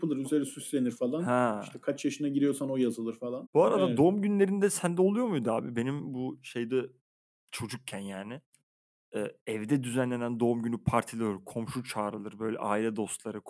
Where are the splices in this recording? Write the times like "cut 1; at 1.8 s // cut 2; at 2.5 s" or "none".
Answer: cut 1; at 3.4 s